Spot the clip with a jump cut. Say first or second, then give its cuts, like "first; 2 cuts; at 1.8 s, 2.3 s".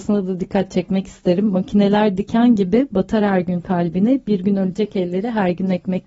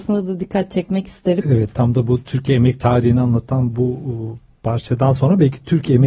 second; 1 cut; at 1.4 s